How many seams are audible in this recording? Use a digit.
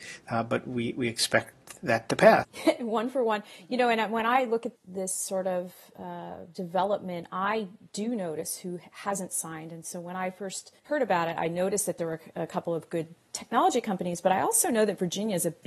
3